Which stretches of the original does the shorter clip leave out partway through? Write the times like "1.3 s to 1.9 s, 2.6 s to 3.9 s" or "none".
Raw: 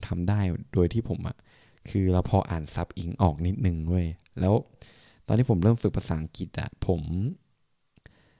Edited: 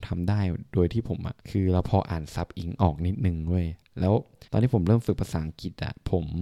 1.4 s to 1.8 s, 4.9 s to 5.2 s